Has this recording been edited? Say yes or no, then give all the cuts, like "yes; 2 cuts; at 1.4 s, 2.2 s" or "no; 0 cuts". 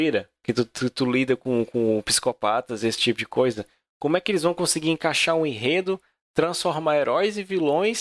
no; 0 cuts